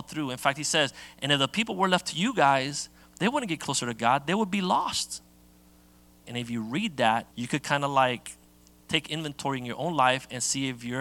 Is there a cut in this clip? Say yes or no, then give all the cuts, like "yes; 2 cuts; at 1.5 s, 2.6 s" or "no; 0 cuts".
yes; 2 cuts; at 6.2 s, 7.3 s